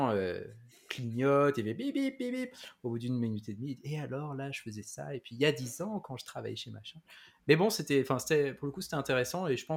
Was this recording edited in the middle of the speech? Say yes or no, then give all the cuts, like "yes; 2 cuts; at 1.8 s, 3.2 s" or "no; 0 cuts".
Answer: no; 0 cuts